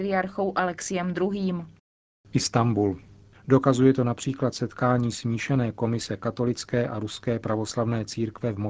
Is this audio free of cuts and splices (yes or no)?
no